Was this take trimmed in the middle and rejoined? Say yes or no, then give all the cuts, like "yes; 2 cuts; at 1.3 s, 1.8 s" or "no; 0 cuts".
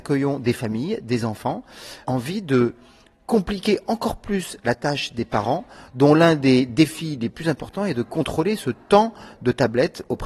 yes; 1 cut; at 2.0 s